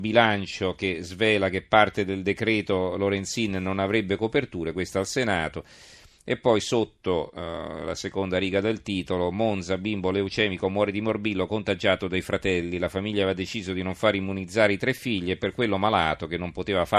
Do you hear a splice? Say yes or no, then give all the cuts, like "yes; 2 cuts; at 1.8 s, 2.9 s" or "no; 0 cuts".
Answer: no; 0 cuts